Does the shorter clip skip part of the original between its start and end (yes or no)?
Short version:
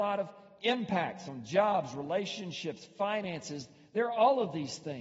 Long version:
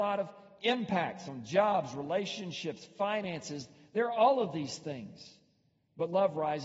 no